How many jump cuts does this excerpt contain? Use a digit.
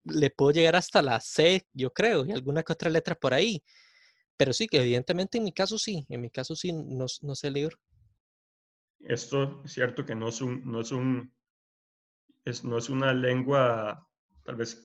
1